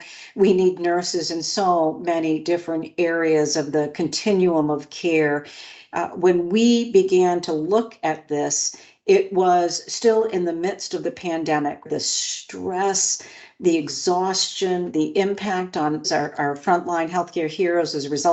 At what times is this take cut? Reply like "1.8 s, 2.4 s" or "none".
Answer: 11.9 s, 16.0 s